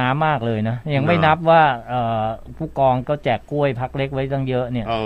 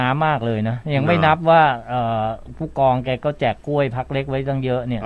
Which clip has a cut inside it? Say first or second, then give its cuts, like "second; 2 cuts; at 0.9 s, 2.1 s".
first; 1 cut; at 3.0 s